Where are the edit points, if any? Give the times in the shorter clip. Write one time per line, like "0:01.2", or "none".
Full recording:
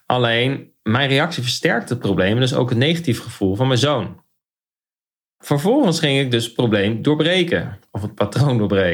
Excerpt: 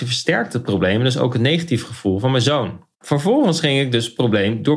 0:02.9